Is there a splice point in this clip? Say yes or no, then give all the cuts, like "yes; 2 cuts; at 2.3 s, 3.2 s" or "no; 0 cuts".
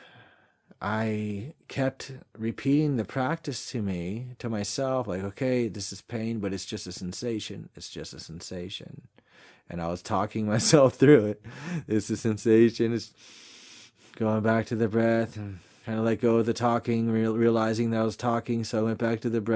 no; 0 cuts